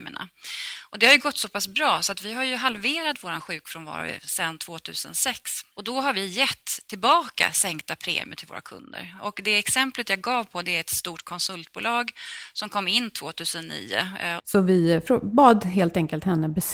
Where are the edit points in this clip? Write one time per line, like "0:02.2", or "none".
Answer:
0:05.7
0:14.4